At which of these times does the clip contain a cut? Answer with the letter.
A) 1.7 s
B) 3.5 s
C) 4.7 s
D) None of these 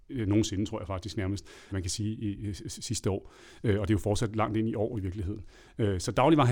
A